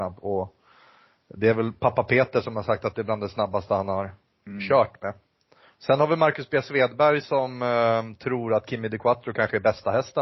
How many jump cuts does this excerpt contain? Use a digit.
0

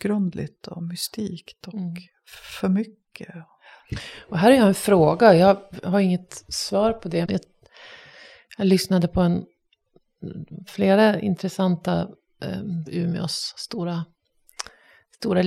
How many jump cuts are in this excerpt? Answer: 2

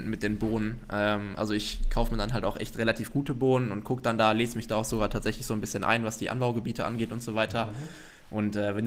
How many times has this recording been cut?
0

